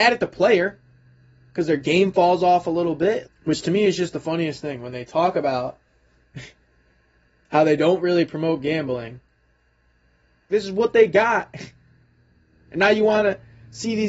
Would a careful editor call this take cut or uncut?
cut